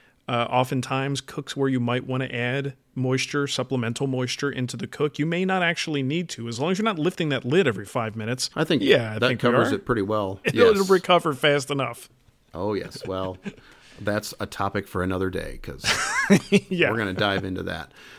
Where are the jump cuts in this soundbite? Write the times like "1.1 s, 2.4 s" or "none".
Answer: 8.5 s, 10.4 s